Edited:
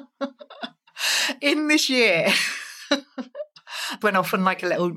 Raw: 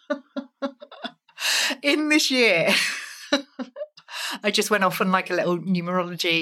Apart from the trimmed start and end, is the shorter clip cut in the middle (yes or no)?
yes